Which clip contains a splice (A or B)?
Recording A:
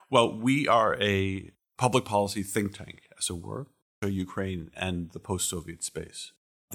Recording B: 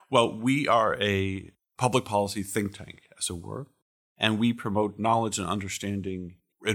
A